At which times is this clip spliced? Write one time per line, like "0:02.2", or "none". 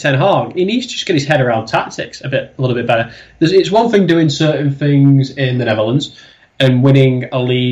none